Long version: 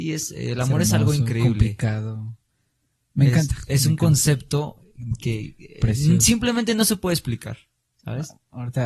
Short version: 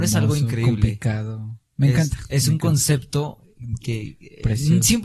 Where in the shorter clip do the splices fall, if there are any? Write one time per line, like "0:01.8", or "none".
0:01.7